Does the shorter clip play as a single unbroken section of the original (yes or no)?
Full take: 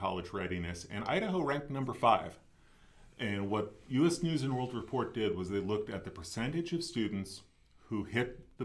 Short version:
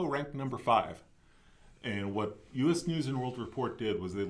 yes